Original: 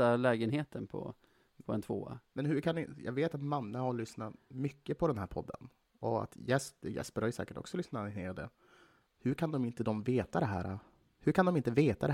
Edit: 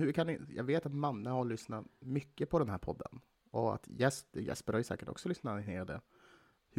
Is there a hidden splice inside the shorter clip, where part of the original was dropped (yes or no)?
no